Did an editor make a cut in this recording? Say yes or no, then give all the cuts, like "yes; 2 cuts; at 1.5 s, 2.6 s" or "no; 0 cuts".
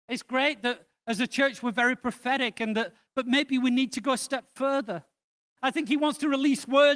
yes; 2 cuts; at 3.1 s, 5.6 s